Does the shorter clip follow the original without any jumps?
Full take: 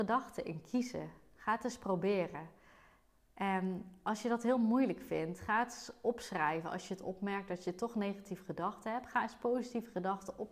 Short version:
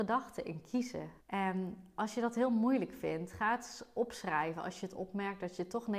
no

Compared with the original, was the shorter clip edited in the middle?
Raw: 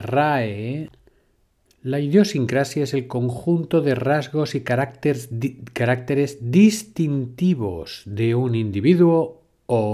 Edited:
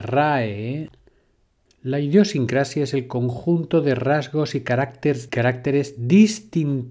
yes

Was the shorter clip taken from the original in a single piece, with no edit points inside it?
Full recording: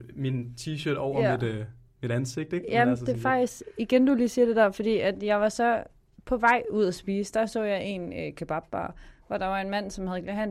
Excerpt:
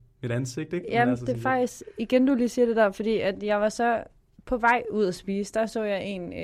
yes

